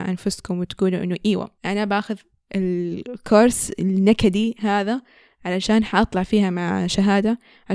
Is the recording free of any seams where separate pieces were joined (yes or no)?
no